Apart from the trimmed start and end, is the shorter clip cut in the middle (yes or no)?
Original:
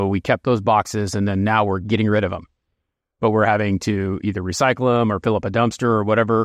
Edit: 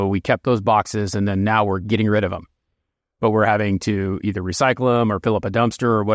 no